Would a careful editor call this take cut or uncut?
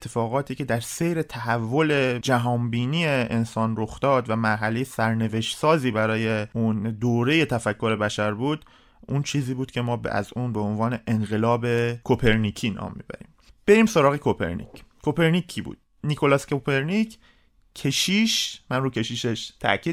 uncut